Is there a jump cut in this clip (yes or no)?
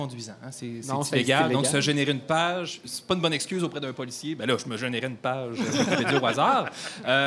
no